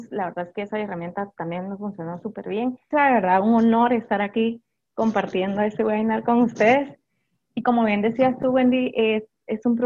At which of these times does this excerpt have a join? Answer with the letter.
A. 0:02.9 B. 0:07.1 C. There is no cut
A